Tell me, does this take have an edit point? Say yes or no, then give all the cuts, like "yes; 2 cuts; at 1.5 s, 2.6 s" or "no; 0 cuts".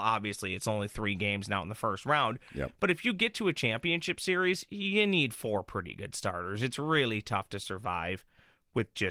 no; 0 cuts